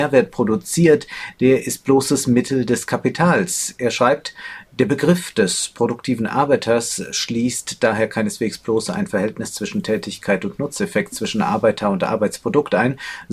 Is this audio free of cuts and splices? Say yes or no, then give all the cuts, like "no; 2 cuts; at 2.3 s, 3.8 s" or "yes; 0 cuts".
yes; 0 cuts